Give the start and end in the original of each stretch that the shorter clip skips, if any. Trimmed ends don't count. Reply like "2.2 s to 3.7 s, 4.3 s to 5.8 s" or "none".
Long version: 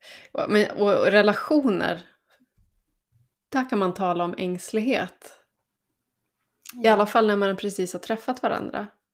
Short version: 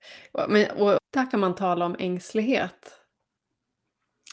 1.0 s to 3.4 s